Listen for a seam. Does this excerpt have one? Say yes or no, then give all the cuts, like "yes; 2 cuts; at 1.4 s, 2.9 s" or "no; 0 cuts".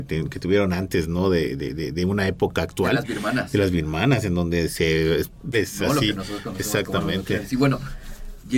yes; 1 cut; at 5.5 s